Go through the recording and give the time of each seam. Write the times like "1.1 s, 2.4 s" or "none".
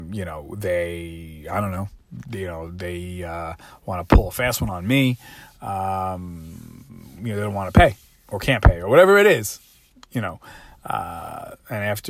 none